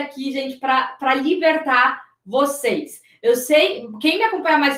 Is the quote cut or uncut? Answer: uncut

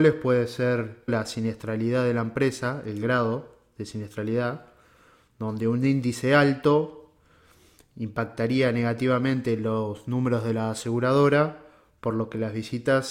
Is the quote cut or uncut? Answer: cut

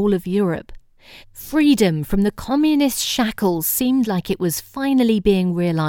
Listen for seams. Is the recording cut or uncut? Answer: cut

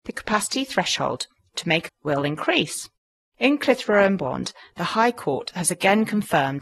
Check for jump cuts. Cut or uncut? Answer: cut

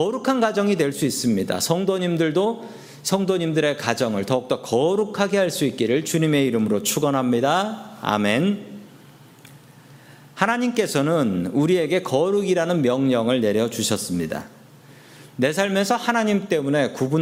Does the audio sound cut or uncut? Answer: uncut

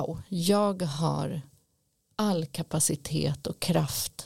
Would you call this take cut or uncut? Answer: uncut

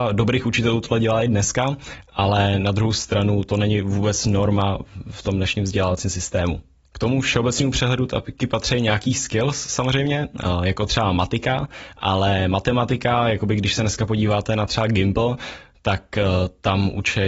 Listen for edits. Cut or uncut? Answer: uncut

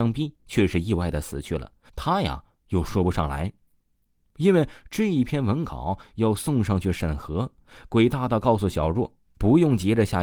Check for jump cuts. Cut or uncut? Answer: cut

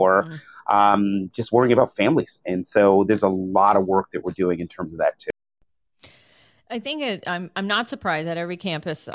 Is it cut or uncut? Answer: uncut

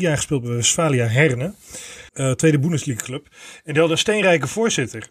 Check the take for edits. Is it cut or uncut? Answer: cut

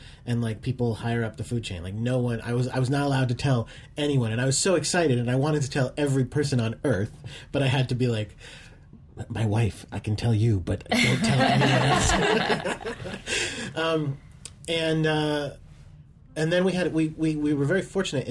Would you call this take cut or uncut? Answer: uncut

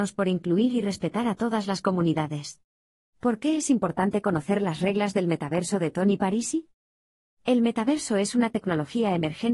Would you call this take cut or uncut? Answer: cut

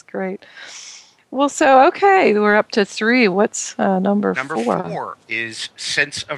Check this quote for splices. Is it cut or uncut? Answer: uncut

